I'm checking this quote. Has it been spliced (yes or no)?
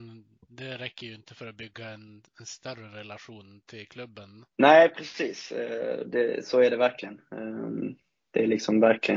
yes